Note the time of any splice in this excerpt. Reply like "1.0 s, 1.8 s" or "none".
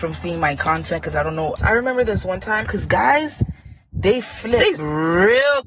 1.6 s, 2.7 s